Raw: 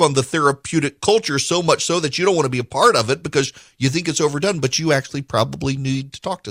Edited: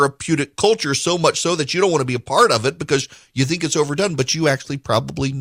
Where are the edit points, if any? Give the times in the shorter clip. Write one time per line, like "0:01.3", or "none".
none